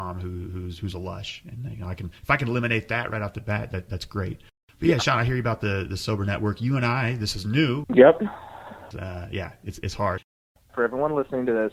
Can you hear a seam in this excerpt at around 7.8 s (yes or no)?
yes